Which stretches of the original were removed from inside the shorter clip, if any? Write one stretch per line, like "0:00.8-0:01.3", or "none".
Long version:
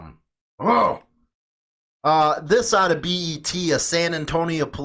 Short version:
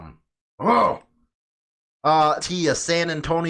0:02.4-0:03.4